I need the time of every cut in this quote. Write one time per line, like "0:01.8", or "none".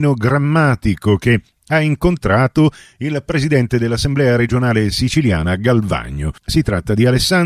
0:06.4